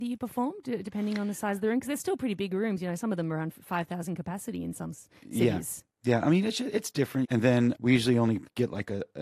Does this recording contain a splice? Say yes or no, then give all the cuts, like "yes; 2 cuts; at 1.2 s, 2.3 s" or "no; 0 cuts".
yes; 1 cut; at 7.2 s